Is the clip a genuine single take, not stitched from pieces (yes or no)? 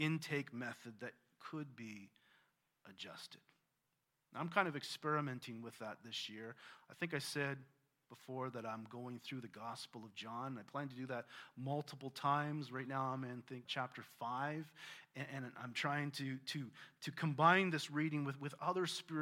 no